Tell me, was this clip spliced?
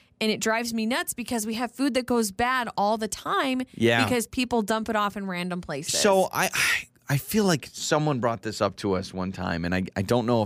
no; 0 cuts

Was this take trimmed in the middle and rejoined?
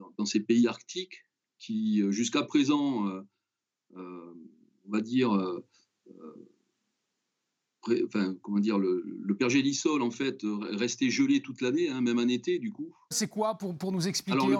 yes; 1 cut; at 13.1 s

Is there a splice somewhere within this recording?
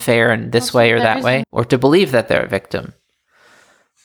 yes; 1 cut; at 1.4 s

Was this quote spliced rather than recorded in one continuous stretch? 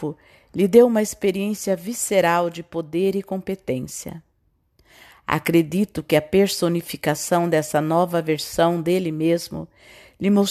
no; 0 cuts

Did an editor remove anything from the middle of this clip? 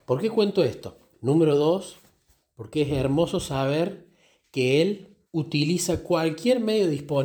yes; 2 cuts; at 1.1 s, 5.3 s

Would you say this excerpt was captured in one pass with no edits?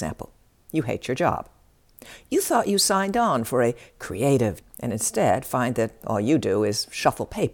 no; 1 cut; at 4.6 s

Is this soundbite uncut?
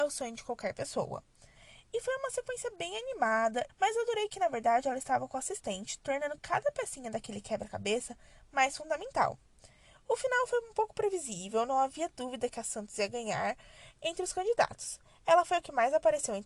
no; 1 cut; at 3.7 s

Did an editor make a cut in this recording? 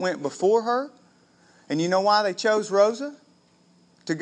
no; 0 cuts

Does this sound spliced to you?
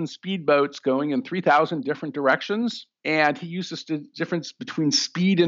no; 0 cuts

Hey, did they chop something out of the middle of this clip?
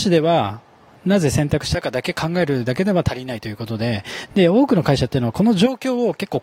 no; 0 cuts

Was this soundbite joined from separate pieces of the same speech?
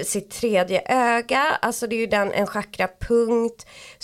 no; 0 cuts

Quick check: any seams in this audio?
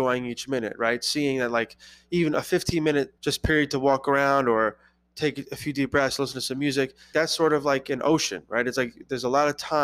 yes; 2 cuts; at 3.2 s, 7.1 s

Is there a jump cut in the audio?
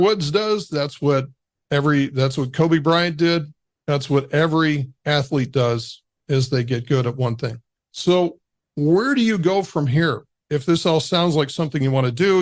no; 0 cuts

